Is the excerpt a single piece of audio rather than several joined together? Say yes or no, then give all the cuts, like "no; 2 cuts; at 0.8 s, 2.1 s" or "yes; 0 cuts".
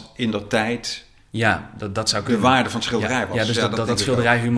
yes; 0 cuts